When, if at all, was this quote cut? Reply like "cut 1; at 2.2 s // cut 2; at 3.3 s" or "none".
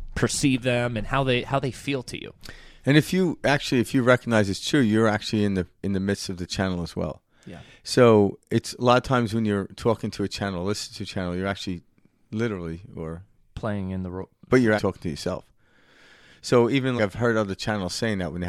cut 1; at 14.8 s // cut 2; at 17.0 s

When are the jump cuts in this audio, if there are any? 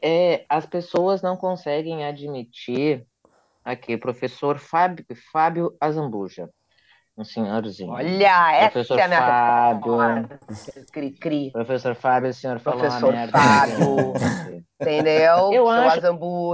cut 1; at 5.1 s

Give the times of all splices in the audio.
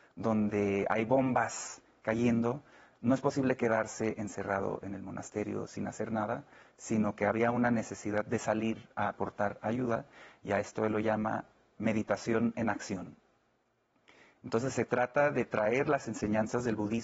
none

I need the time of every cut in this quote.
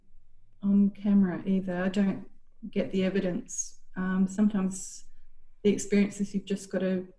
none

